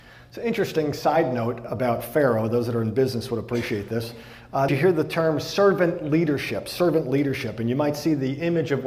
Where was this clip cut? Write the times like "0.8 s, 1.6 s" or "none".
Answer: 4.7 s